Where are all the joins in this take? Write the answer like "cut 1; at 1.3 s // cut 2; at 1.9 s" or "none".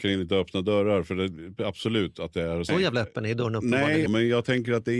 cut 1; at 2.7 s // cut 2; at 4.1 s